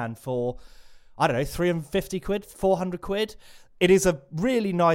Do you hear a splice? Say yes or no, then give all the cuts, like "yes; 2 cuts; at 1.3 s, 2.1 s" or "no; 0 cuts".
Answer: no; 0 cuts